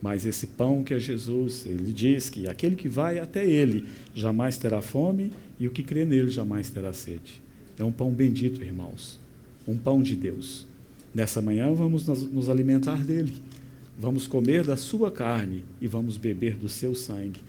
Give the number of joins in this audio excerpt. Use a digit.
0